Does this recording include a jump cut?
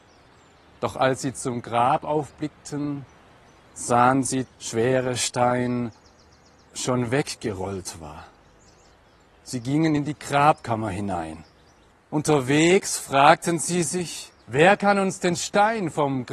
yes; 3 cuts; at 4.4 s, 11.9 s, 14.4 s

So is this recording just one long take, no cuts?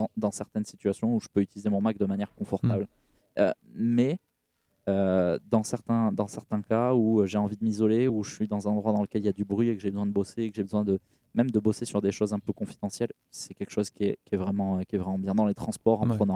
yes; 0 cuts

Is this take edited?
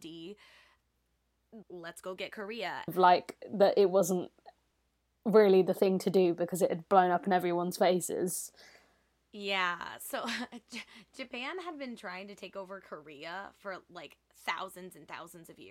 yes; 2 cuts; at 1.6 s, 2.9 s

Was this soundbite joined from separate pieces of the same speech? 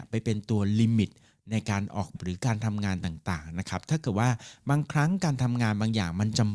yes; 1 cut; at 2.1 s

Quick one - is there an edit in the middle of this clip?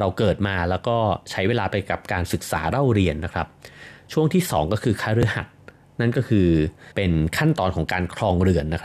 yes; 1 cut; at 6.9 s

